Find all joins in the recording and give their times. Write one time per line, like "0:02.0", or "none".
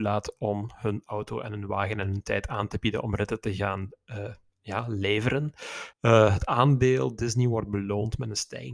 0:05.9